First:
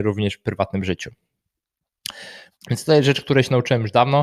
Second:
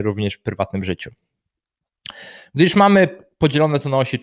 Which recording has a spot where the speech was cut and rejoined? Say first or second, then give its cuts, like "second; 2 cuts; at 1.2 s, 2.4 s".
first; 1 cut; at 2.5 s